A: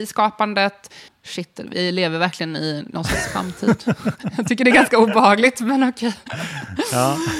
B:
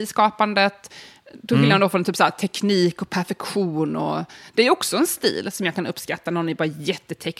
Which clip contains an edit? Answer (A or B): A